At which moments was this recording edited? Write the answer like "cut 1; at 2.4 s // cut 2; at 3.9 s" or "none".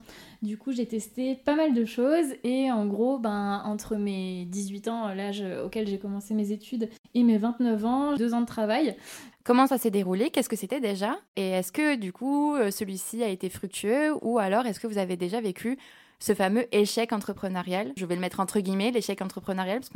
cut 1; at 8.2 s // cut 2; at 9.3 s // cut 3; at 18.0 s